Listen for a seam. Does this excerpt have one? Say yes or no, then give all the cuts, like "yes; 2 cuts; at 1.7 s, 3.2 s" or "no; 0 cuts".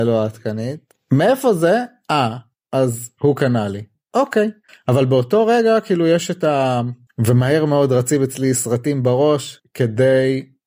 yes; 1 cut; at 7.1 s